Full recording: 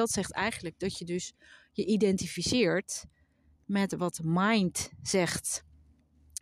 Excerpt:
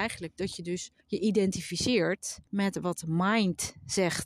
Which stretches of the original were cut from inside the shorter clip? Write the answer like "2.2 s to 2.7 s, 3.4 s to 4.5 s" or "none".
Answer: 1.4 s to 1.7 s, 3.1 s to 3.6 s